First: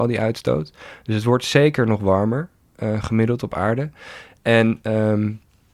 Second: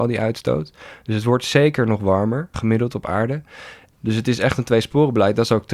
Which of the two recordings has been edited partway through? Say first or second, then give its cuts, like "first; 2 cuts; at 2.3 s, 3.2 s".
second; 2 cuts; at 2.5 s, 3.9 s